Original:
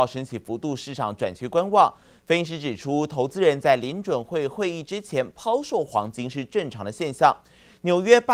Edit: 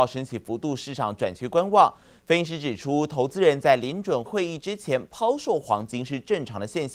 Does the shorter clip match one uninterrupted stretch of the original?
no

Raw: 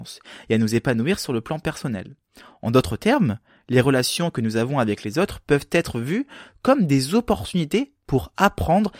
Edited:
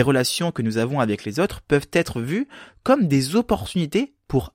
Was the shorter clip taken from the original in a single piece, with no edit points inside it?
yes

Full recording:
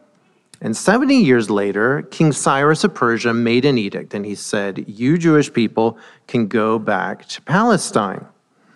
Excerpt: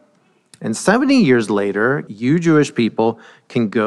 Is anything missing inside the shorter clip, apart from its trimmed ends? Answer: yes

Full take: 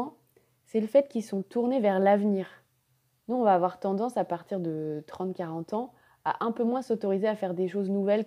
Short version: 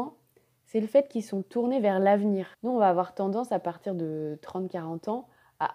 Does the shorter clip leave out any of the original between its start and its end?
yes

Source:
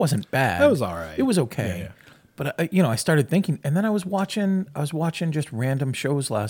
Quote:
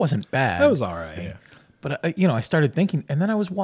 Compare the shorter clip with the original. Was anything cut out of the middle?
yes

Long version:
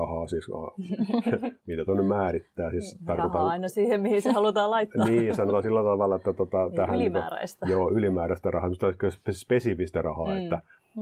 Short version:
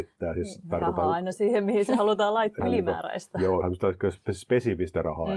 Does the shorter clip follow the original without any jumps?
no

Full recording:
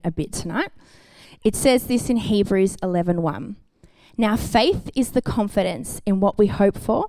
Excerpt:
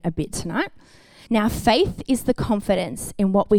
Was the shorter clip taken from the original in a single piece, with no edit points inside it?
no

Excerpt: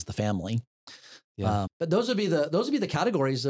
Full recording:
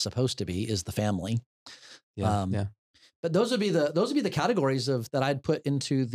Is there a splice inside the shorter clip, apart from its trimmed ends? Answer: yes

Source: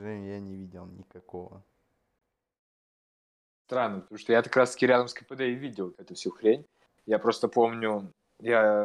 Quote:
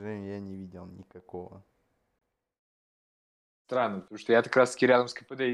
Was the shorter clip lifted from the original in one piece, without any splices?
yes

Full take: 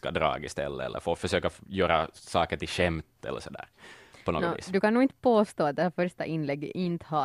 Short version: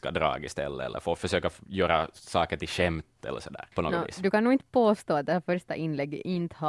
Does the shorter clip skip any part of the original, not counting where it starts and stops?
yes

